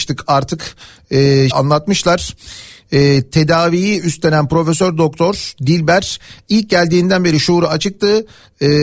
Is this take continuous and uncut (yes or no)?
no